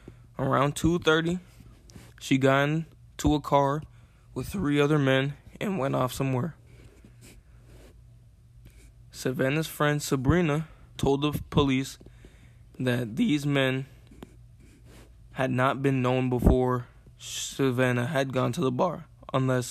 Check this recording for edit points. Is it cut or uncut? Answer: cut